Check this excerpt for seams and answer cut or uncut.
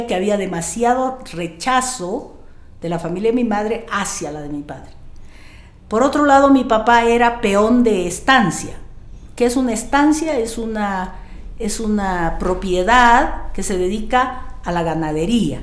uncut